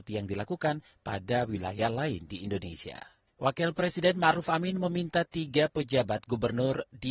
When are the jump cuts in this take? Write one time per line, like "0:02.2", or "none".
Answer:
0:03.3

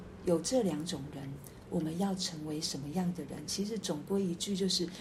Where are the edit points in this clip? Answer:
none

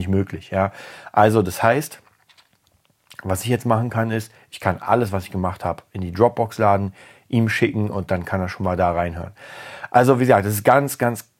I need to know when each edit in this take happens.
none

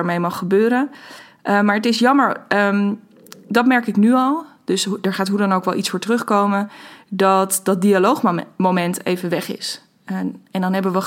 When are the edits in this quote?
none

